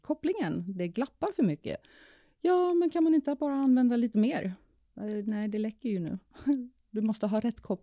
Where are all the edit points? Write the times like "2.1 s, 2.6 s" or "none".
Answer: none

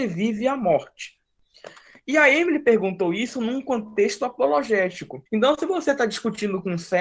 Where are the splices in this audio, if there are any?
5.3 s

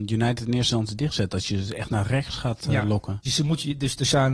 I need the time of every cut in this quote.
3.2 s

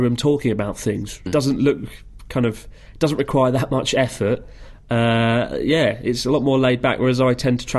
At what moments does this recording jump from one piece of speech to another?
1.3 s

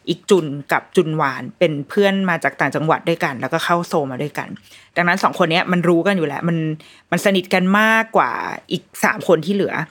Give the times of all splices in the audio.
none

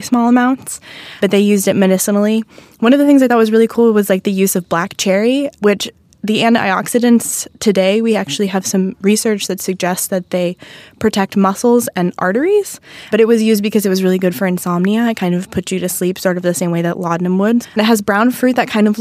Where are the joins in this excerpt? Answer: 17.6 s

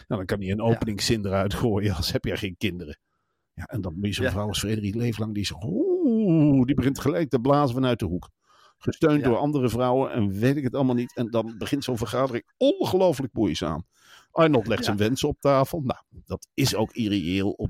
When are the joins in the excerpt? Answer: 16.2 s

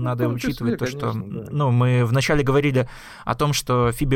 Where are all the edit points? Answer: none

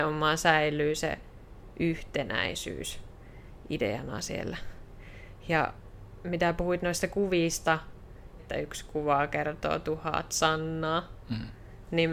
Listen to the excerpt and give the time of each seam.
8.4 s

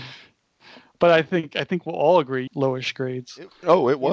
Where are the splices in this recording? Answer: 2.5 s

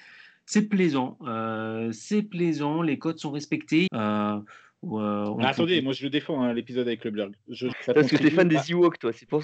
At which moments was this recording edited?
3.9 s, 7.7 s

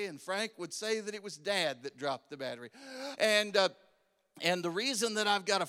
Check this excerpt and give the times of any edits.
3.2 s

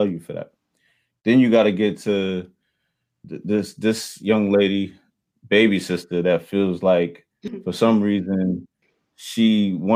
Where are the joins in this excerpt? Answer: none

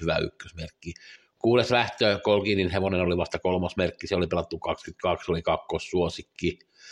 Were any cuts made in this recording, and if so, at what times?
none

